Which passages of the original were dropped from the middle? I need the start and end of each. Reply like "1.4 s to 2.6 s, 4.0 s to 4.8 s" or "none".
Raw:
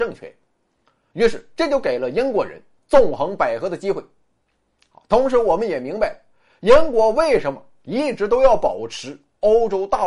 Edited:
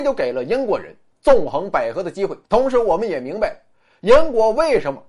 4.1 s to 5.0 s